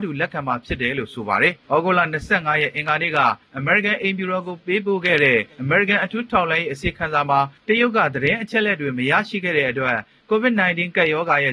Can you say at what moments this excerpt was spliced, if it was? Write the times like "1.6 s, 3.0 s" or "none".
none